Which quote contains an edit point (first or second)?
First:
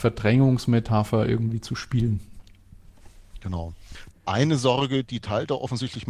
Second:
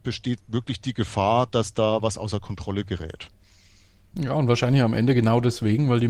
first